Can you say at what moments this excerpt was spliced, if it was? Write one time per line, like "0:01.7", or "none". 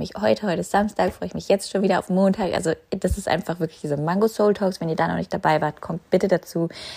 none